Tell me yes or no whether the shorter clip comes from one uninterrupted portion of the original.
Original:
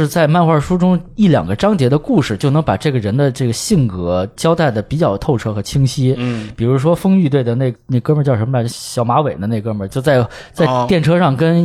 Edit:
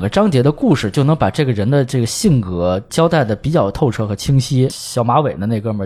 no